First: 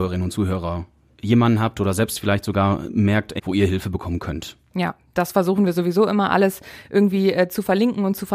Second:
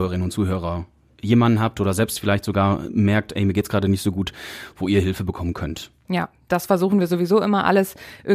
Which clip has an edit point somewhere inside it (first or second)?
first